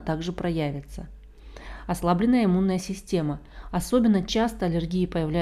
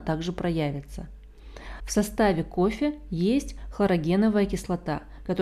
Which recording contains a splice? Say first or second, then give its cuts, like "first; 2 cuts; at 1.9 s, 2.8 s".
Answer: second; 1 cut; at 1.8 s